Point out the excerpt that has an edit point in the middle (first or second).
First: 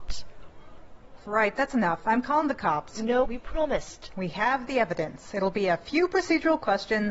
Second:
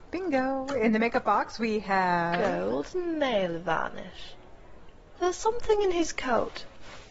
first